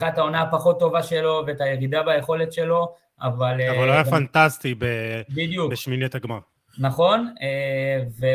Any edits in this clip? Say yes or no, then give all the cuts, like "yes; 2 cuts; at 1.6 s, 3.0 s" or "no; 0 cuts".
no; 0 cuts